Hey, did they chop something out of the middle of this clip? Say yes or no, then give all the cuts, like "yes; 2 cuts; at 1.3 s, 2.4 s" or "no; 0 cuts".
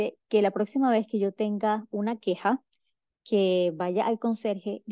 no; 0 cuts